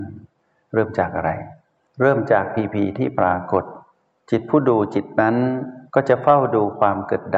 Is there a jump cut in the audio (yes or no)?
no